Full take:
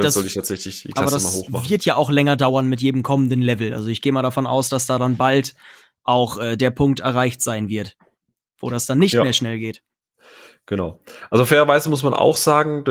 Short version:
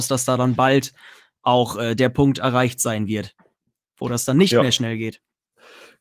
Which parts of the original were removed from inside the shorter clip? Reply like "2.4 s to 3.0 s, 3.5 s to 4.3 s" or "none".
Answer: none